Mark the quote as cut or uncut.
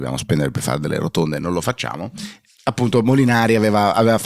uncut